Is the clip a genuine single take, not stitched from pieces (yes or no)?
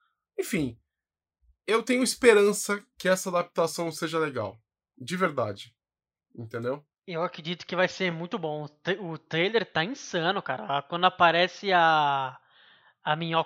yes